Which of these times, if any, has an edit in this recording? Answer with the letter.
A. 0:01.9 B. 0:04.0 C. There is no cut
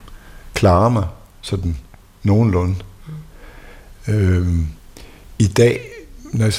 C